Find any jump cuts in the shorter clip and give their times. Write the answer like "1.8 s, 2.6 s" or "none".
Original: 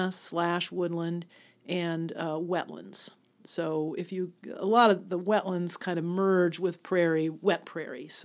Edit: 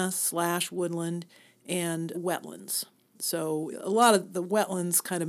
2.1 s, 3.7 s